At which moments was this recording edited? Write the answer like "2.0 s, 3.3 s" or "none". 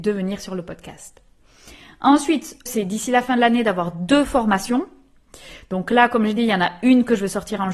2.7 s